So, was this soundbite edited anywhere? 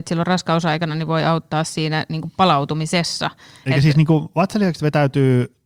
no; 0 cuts

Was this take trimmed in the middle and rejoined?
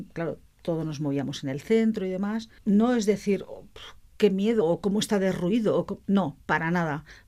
yes; 2 cuts; at 2.6 s, 4.6 s

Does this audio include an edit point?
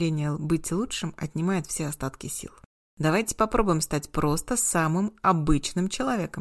yes; 1 cut; at 2.8 s

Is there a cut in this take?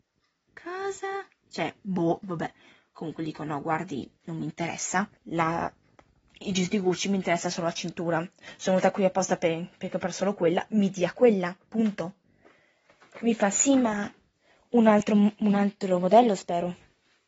yes; 1 cut; at 5.2 s

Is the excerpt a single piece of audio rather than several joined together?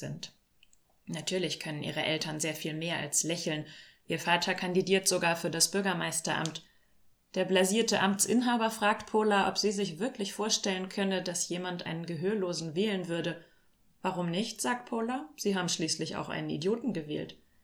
yes; 0 cuts

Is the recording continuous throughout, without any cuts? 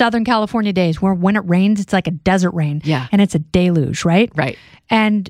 yes; 0 cuts

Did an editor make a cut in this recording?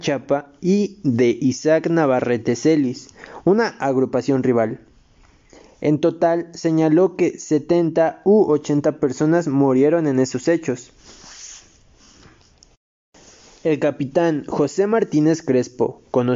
no; 0 cuts

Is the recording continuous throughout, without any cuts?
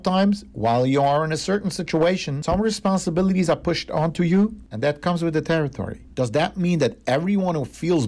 no; 1 cut; at 6.1 s

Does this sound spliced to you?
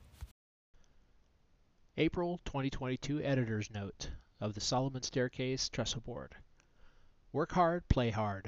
no; 0 cuts

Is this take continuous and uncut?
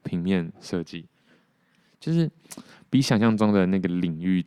yes; 0 cuts

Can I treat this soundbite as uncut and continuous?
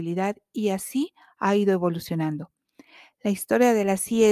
yes; 0 cuts

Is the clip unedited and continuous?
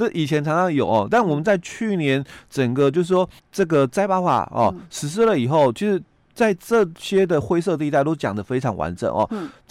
no; 1 cut; at 3.4 s

